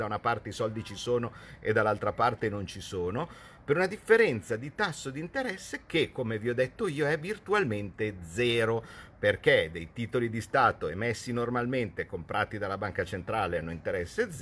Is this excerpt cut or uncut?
uncut